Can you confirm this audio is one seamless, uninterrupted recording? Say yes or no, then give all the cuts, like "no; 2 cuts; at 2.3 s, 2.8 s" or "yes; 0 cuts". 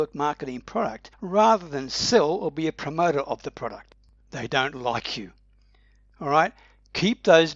no; 1 cut; at 4.2 s